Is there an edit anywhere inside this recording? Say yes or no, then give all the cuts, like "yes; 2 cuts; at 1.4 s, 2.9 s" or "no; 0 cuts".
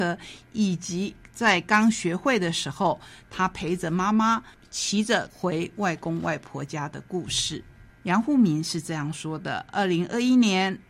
no; 0 cuts